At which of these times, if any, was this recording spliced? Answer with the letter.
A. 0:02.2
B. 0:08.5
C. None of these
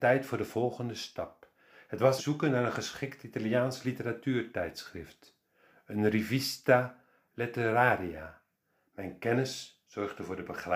A